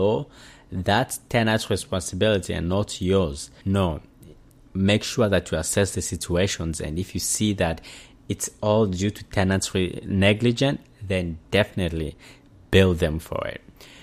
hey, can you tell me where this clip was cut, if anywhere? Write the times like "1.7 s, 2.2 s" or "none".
3.6 s